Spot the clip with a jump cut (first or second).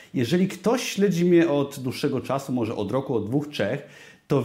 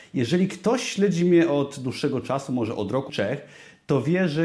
second